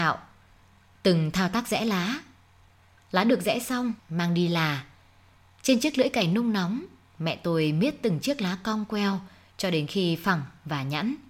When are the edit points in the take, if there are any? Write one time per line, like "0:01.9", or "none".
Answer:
0:04.0